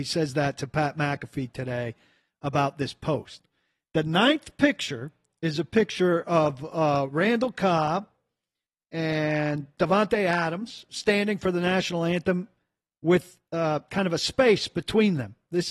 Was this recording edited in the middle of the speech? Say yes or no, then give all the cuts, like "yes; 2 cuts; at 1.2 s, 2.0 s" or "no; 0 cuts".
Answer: no; 0 cuts